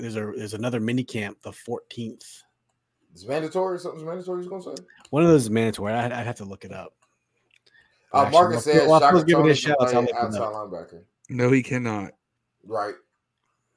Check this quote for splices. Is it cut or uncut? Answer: uncut